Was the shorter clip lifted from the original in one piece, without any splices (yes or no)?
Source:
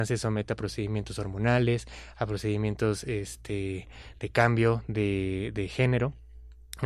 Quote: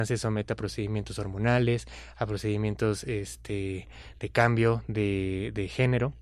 yes